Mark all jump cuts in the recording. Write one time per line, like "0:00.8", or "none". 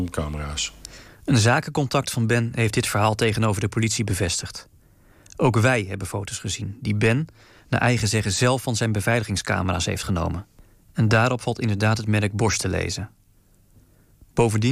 none

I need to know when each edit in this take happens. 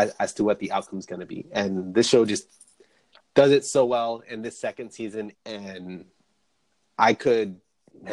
0:05.3

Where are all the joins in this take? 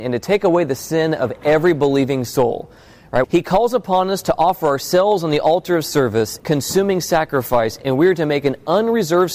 0:03.2
0:06.4

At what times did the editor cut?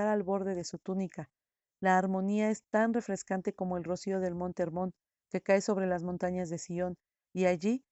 none

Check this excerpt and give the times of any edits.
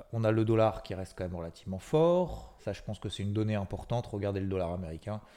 0:02.6

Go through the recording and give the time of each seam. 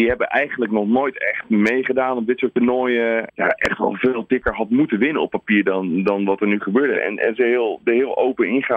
0:03.3
0:06.9

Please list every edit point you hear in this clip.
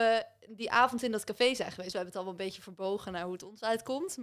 0:01.9

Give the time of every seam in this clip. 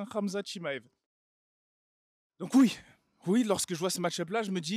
none

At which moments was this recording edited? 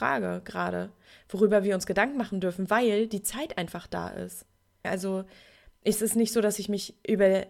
0:04.8

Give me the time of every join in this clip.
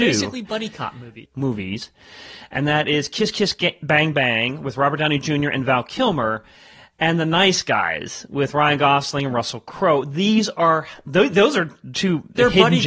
0:01.3

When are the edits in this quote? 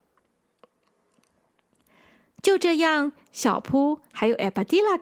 0:03.3

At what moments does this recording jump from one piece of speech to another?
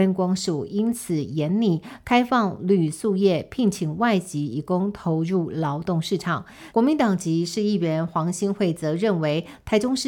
0:06.7

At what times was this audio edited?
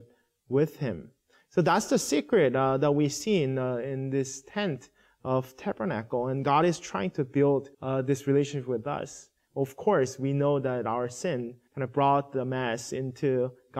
0:07.7
0:09.5
0:11.7

